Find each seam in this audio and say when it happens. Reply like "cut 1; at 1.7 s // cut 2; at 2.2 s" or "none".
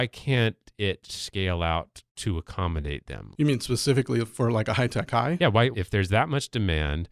cut 1; at 2.1 s // cut 2; at 3.3 s // cut 3; at 5.7 s